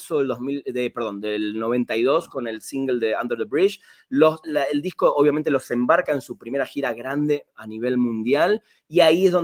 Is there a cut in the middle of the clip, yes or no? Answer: yes